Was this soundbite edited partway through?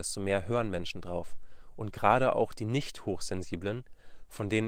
no; 0 cuts

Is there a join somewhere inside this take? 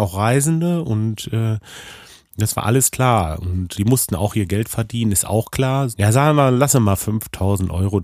yes; 2 cuts; at 3.8 s, 5.9 s

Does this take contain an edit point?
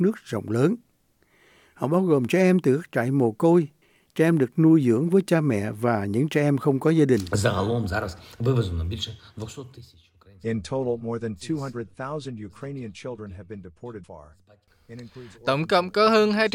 yes; 1 cut; at 14.0 s

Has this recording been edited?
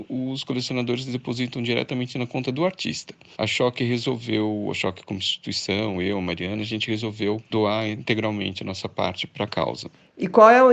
no; 0 cuts

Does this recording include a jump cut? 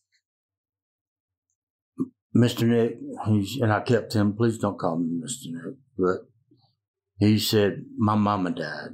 no; 0 cuts

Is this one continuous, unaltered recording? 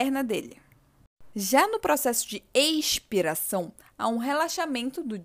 no; 1 cut; at 1.3 s

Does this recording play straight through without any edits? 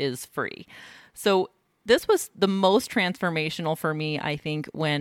yes; 0 cuts

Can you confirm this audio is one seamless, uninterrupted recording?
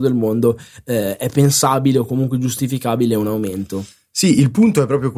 yes; 0 cuts

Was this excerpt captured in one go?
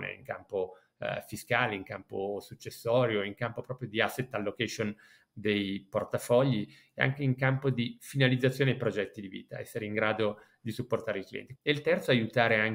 no; 1 cut; at 11.6 s

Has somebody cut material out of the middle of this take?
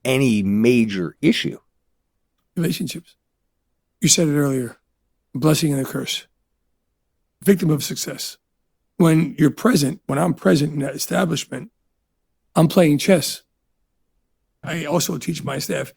no; 0 cuts

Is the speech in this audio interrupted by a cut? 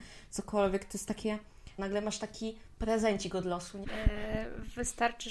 yes; 2 cuts; at 1.8 s, 3.8 s

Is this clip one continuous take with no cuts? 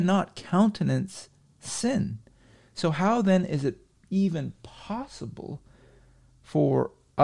yes; 0 cuts

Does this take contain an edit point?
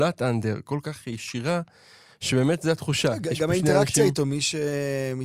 no; 0 cuts

